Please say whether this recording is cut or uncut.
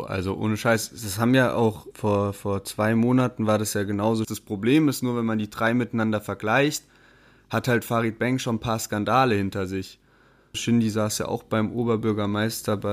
cut